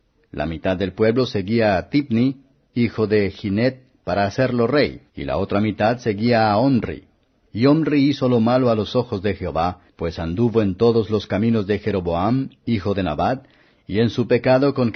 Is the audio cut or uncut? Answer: cut